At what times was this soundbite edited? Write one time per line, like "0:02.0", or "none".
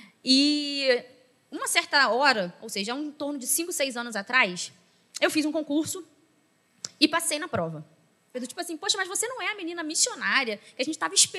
0:08.3